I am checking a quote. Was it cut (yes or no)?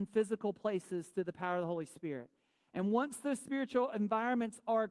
no